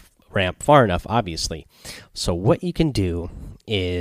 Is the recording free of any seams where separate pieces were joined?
yes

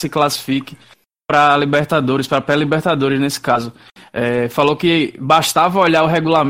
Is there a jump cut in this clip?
no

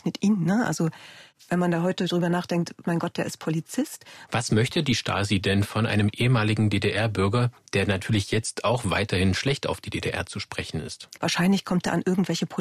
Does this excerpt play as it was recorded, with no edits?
no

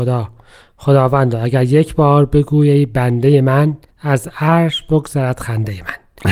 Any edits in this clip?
no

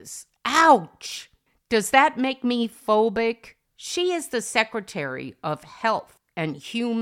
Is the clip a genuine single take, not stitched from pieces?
no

